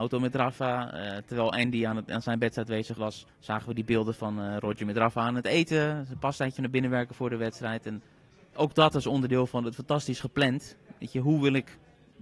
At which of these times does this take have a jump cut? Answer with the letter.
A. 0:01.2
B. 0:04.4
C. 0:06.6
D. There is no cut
C